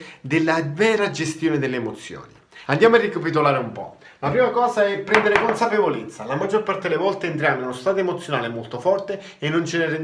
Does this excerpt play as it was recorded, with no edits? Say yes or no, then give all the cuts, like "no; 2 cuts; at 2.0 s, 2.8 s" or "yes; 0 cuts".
yes; 0 cuts